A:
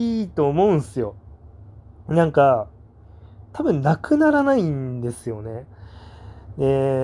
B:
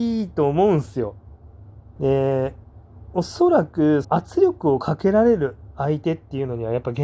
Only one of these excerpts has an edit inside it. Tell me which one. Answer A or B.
B